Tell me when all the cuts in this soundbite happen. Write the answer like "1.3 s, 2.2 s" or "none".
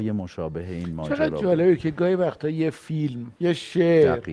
3.4 s